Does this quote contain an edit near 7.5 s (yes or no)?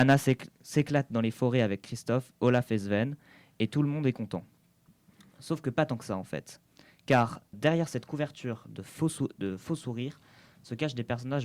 yes